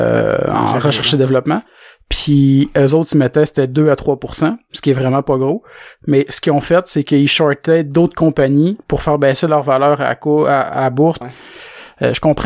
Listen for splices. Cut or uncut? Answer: cut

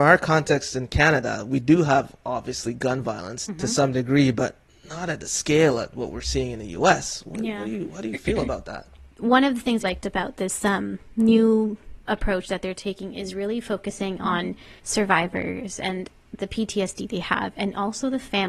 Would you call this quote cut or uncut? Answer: cut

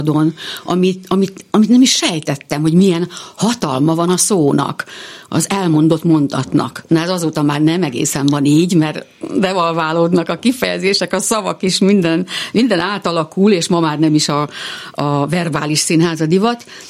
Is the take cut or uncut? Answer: uncut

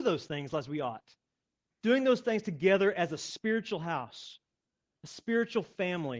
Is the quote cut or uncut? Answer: cut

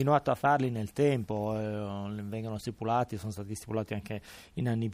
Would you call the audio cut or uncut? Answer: uncut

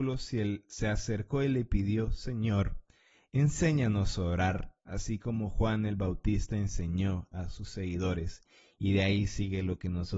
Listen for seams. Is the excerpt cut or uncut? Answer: uncut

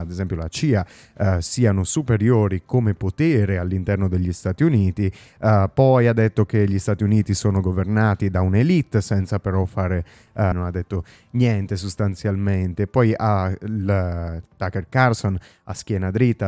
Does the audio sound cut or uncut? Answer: cut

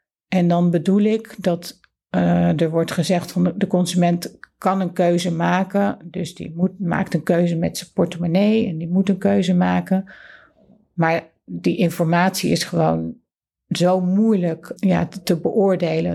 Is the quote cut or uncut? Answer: cut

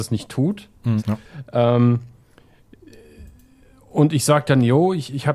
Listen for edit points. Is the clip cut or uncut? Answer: cut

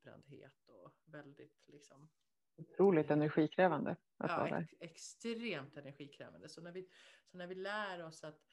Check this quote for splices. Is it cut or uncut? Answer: uncut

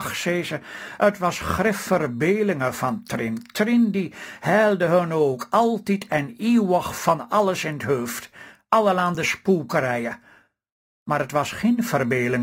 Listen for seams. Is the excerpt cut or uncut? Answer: uncut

